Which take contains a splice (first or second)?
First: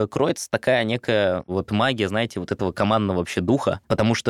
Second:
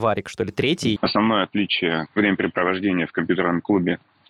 second